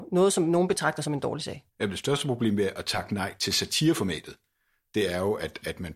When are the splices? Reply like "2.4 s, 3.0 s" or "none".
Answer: 1.7 s